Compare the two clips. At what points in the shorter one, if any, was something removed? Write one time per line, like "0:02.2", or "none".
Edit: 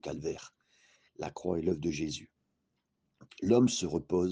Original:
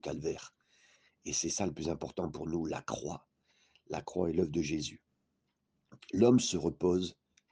0:01.1